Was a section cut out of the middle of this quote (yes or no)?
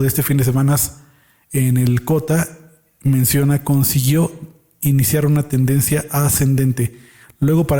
no